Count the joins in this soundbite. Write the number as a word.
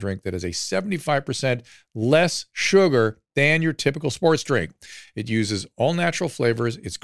zero